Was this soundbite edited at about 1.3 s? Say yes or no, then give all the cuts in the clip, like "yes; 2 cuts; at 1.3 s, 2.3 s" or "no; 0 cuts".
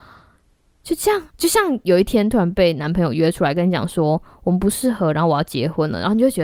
yes; 1 cut; at 1.3 s